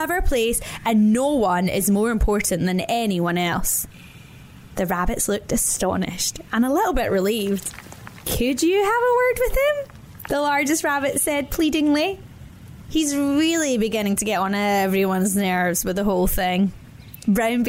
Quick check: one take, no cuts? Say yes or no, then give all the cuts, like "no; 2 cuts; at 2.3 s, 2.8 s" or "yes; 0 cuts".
yes; 0 cuts